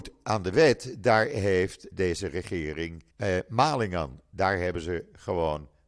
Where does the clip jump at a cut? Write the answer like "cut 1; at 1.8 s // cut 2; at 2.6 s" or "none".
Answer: cut 1; at 1.9 s // cut 2; at 3.1 s